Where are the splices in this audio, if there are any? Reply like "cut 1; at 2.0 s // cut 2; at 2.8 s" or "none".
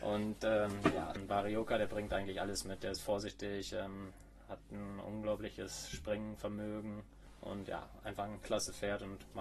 none